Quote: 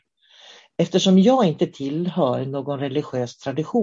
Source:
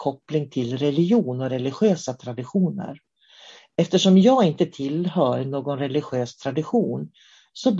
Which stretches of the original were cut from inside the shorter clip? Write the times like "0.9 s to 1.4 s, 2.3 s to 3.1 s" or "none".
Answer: none

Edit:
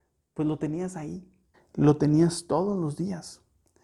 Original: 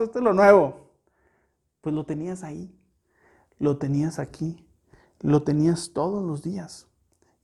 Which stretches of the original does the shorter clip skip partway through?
3.0 s to 5.0 s

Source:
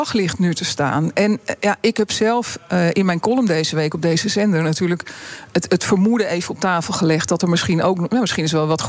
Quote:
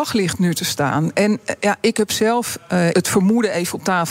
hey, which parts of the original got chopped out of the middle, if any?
2.9 s to 5.7 s

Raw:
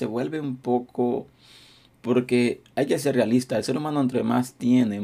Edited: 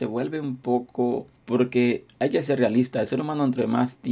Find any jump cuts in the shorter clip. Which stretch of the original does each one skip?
1.4 s to 1.9 s

